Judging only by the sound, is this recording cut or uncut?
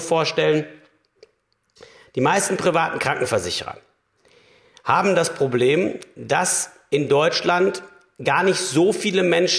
uncut